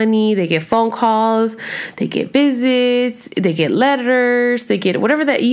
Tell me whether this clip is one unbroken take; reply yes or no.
yes